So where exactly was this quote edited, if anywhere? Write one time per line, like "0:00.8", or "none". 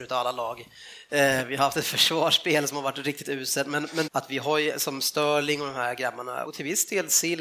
0:01.1
0:04.1
0:06.5